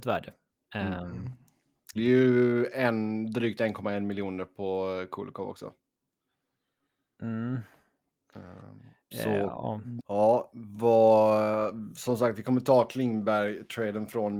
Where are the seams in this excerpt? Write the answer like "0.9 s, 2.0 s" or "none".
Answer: 2.0 s, 10.0 s